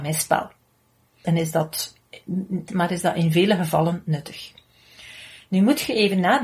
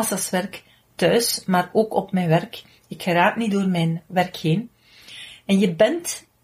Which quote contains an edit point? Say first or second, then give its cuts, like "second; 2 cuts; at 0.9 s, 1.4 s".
first; 2 cuts; at 1.2 s, 2.7 s